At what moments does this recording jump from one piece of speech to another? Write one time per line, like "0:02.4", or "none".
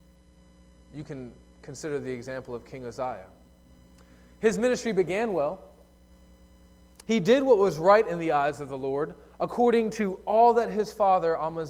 0:07.0